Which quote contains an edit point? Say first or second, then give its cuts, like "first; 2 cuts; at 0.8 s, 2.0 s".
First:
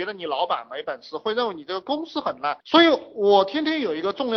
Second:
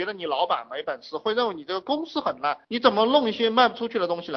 first; 1 cut; at 2.6 s